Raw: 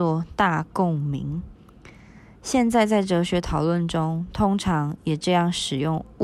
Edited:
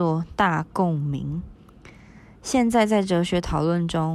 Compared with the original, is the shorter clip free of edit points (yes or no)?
yes